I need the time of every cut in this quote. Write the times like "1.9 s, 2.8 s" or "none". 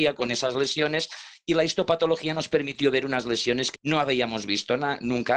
3.7 s